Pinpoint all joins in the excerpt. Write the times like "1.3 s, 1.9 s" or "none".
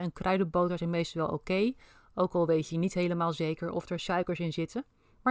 none